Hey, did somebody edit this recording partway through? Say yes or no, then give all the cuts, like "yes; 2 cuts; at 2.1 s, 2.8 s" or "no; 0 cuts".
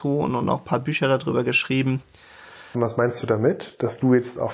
yes; 1 cut; at 2.7 s